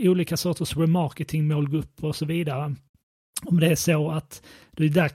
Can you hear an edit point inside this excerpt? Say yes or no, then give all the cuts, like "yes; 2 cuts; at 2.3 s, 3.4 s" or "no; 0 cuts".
no; 0 cuts